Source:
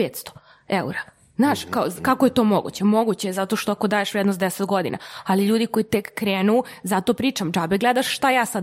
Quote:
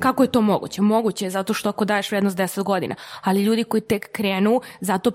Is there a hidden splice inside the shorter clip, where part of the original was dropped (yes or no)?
no